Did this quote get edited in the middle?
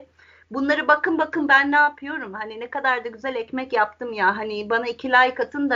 no; 0 cuts

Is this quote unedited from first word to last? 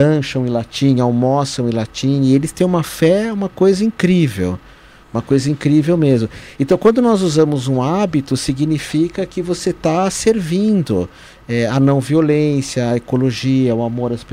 yes; 0 cuts

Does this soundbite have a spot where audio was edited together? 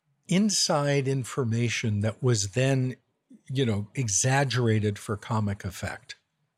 no; 0 cuts

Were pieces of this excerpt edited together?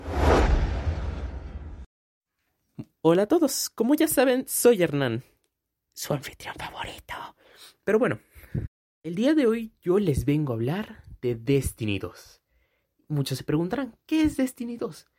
no; 0 cuts

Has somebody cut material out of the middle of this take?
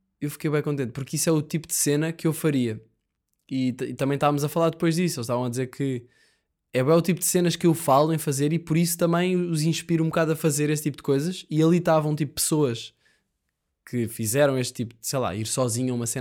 no; 0 cuts

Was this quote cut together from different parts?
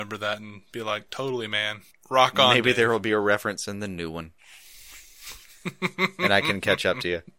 no; 0 cuts

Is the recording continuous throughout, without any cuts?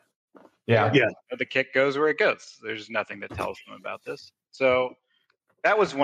yes; 0 cuts

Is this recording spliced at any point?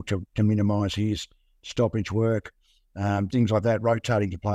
yes; 1 cut; at 3.3 s

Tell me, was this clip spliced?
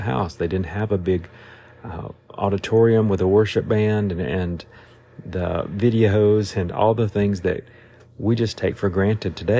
no; 0 cuts

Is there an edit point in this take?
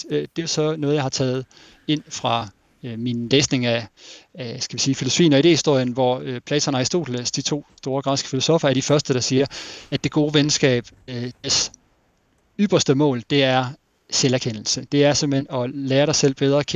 no; 0 cuts

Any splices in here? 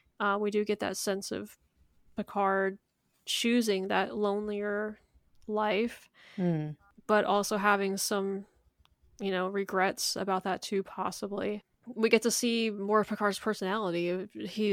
no; 0 cuts

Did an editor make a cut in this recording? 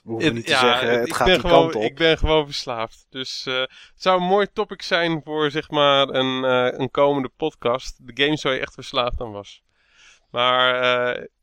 no; 0 cuts

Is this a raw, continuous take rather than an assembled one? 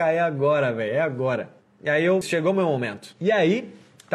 no; 1 cut; at 2.2 s

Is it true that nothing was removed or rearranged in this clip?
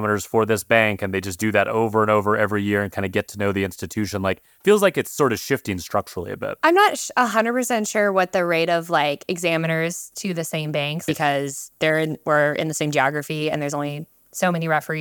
no; 1 cut; at 11.1 s

